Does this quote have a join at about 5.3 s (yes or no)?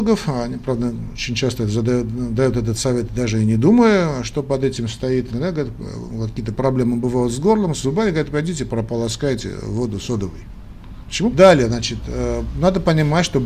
yes